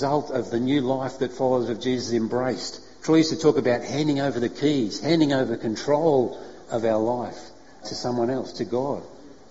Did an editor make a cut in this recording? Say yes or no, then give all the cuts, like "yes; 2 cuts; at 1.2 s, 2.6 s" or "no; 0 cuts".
yes; 1 cut; at 7.8 s